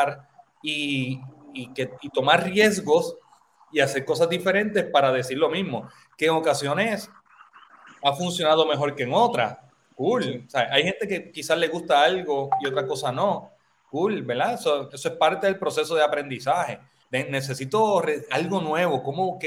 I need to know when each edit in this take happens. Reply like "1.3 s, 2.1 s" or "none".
14.9 s, 17.0 s

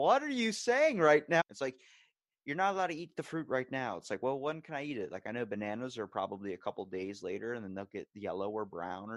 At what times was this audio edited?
1.4 s

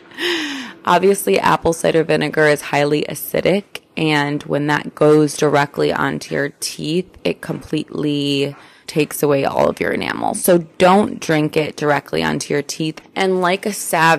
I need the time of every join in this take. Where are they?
8.9 s, 13.0 s

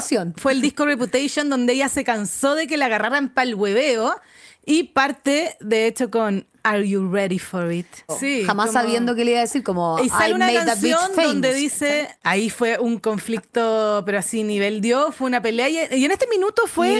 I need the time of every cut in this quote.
4.6 s, 8.1 s

